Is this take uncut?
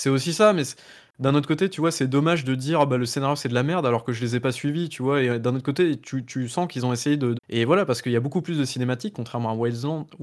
no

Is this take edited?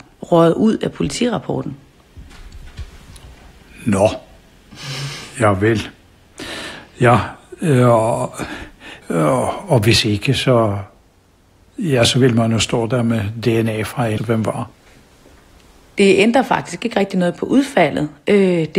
yes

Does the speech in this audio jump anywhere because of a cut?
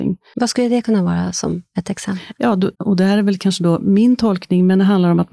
yes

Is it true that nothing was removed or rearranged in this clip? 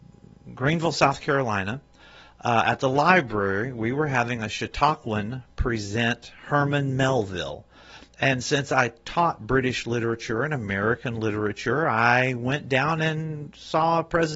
yes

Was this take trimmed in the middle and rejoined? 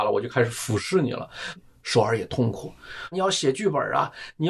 yes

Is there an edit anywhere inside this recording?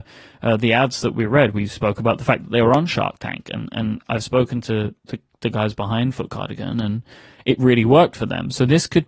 no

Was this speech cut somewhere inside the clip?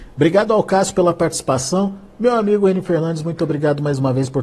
no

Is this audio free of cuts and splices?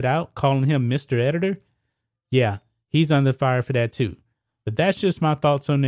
yes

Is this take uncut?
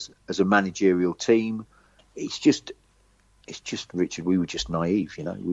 yes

